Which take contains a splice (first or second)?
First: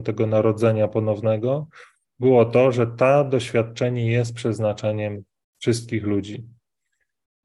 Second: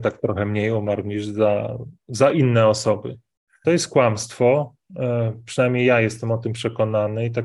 second